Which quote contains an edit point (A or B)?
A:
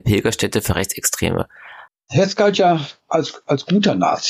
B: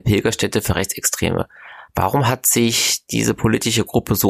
A